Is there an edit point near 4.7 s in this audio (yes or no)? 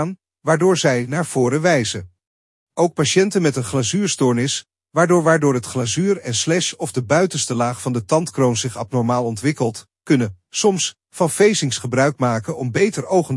no